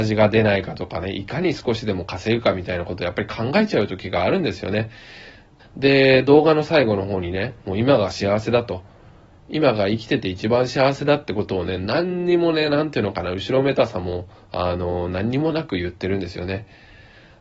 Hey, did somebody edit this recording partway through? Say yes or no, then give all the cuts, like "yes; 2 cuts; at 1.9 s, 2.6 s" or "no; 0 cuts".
yes; 1 cut; at 5.6 s